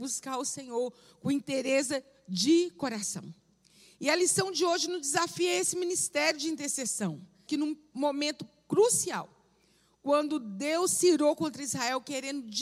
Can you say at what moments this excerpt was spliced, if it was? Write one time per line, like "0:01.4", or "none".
0:07.5